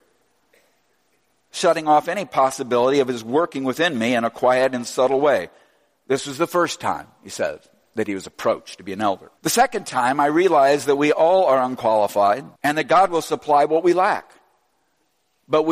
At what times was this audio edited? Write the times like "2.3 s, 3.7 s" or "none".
9.4 s, 12.6 s